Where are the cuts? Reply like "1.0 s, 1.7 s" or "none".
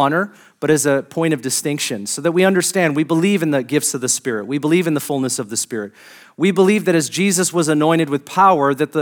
none